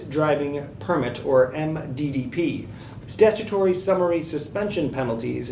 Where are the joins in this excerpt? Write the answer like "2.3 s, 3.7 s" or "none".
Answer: 3.0 s